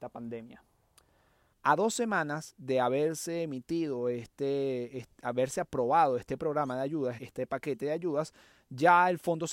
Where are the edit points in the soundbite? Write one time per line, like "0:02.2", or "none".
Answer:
0:01.5
0:07.2